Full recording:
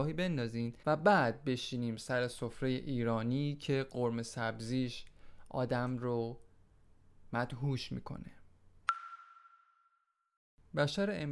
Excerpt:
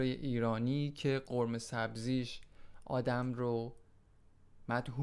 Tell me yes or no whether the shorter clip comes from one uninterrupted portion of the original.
yes